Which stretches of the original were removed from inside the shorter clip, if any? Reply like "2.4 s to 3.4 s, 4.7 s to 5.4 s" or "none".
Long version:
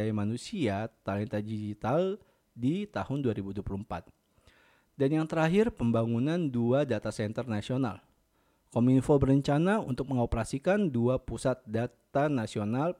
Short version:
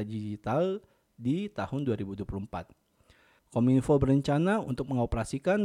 4.8 s to 8.6 s